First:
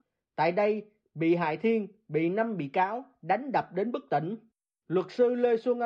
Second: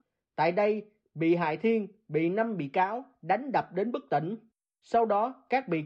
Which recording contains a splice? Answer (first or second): first